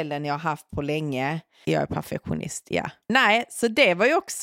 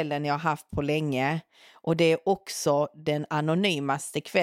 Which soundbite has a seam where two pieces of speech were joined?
first; 1 cut; at 1.6 s

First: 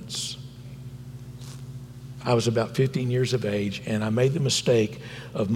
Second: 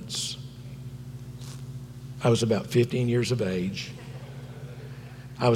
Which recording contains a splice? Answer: first; 1 cut; at 2.2 s

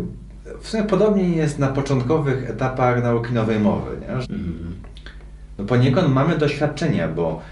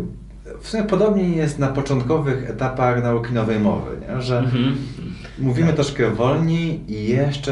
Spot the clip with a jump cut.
first; 1 cut; at 4.2 s

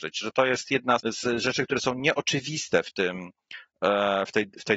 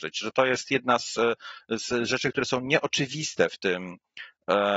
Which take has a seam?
first; 1 cut; at 1.0 s

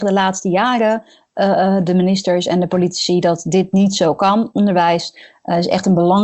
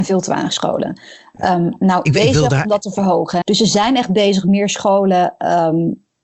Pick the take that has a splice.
second; 2 cuts; at 2.1 s, 3.4 s

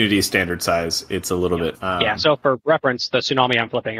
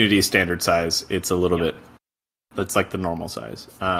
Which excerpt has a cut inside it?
first; 1 cut; at 1.7 s

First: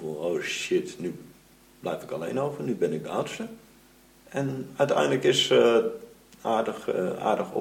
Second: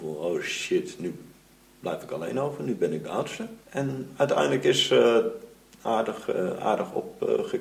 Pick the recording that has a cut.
second; 1 cut; at 3.6 s

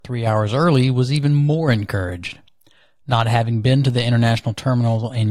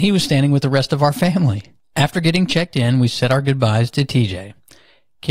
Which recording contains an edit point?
second; 1 cut; at 1.8 s

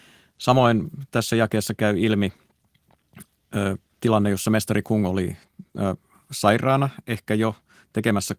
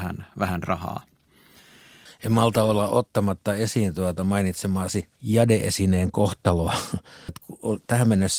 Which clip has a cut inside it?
second; 3 cuts; at 2.1 s, 5.1 s, 7.3 s

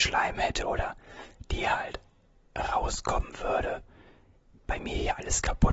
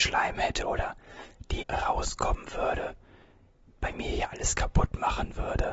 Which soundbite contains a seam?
second; 1 cut; at 1.6 s

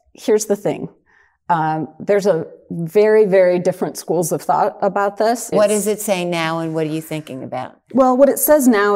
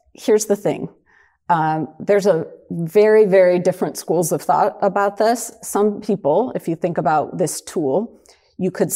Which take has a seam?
first; 1 cut; at 5.5 s

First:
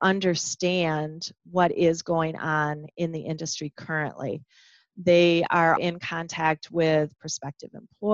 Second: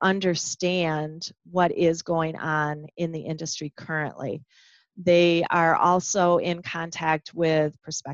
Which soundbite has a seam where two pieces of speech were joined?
first; 1 cut; at 5.8 s

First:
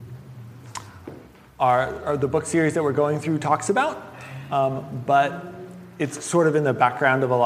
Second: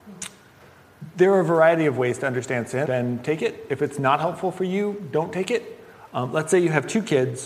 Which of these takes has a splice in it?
second; 2 cuts; at 2.9 s, 6.1 s

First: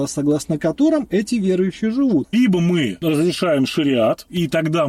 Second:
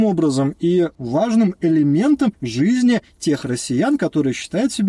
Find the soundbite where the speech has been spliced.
first; 1 cut; at 2.3 s

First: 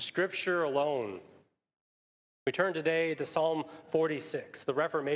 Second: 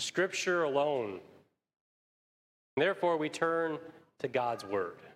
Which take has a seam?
first; 1 cut; at 2.3 s

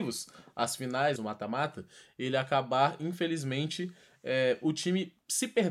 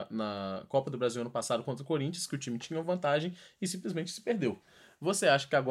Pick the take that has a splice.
first; 1 cut; at 1.2 s

